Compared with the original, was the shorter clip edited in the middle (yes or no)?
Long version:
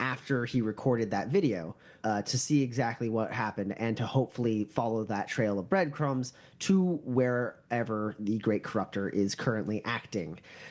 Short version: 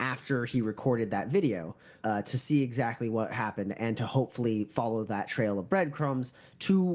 no